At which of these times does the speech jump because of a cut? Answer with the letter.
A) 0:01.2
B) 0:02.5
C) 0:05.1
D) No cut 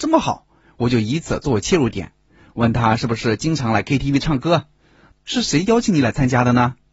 C